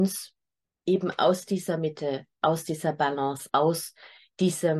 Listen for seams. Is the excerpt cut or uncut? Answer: cut